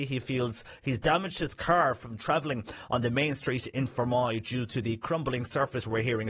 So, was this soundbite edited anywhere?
no; 0 cuts

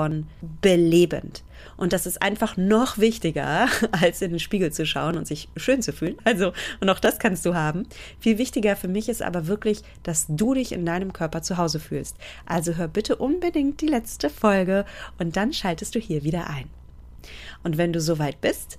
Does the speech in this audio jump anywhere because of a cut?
yes; 1 cut; at 6.2 s

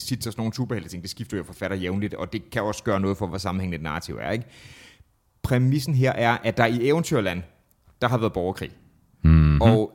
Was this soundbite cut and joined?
no; 0 cuts

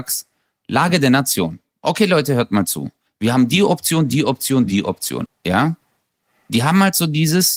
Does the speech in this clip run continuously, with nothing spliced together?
no; 2 cuts; at 3.1 s, 5.3 s

